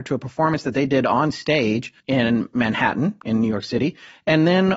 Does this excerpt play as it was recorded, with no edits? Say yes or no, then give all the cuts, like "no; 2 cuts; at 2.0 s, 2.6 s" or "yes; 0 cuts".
no; 1 cut; at 2.0 s